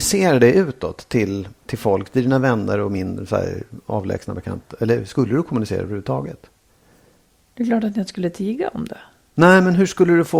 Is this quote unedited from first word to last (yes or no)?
yes